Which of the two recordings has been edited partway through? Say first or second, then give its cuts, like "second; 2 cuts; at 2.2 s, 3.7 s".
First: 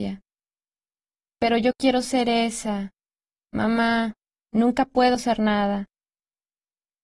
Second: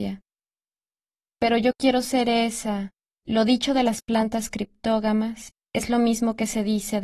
second; 1 cut; at 3.1 s